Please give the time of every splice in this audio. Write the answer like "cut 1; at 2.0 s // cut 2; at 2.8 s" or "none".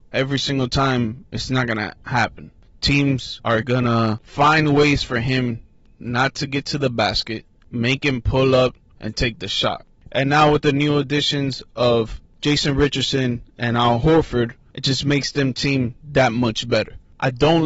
cut 1; at 10.0 s